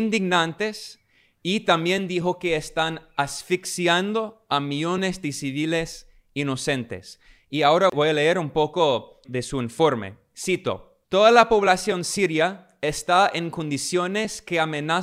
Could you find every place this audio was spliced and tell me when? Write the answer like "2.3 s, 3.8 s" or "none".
9.2 s, 11.0 s